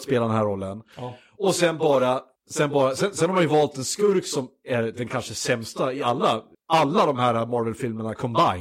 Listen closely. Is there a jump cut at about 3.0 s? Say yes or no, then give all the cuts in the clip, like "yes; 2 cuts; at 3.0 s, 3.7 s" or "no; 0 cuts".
no; 0 cuts